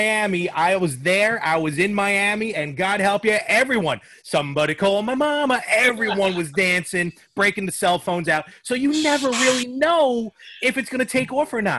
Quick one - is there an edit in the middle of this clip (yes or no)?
no